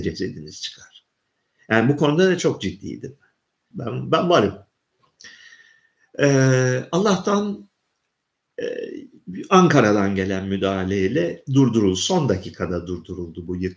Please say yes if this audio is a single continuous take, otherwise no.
no